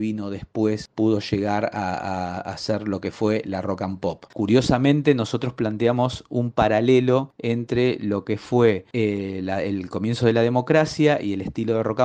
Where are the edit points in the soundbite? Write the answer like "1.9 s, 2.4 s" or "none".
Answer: 4.3 s